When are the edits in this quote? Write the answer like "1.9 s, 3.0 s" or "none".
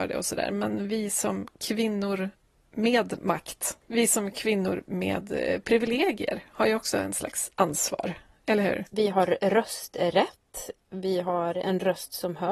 8.9 s